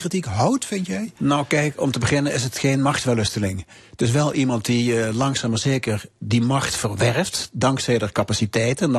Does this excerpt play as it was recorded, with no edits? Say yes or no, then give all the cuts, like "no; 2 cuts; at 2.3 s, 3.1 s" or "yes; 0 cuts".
yes; 0 cuts